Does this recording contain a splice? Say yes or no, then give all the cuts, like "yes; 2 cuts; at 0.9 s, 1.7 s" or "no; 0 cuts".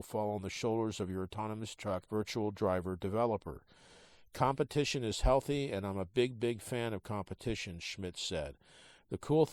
yes; 1 cut; at 2.1 s